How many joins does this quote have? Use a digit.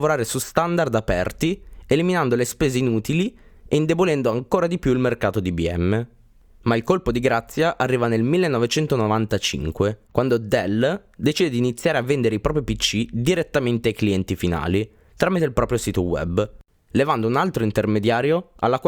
1